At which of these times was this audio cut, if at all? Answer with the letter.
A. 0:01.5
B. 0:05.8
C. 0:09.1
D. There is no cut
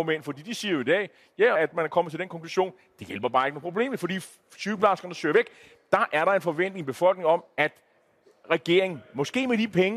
A